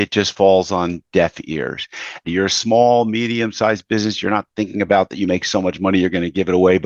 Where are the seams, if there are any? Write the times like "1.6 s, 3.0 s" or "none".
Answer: 2.2 s